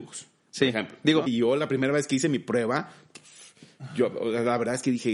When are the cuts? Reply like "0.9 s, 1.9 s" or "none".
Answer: 1.3 s